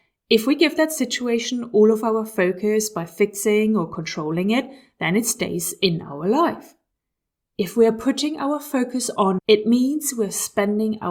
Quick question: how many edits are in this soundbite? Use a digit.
1